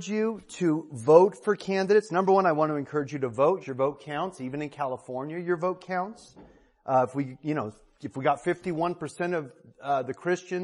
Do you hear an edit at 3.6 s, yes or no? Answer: yes